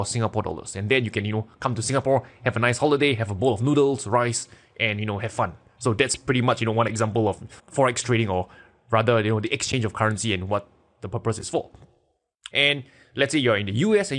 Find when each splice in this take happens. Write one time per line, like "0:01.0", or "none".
0:07.6
0:12.5